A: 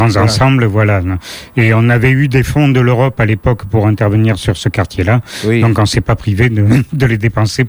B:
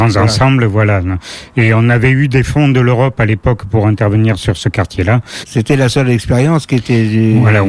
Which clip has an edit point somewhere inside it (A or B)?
B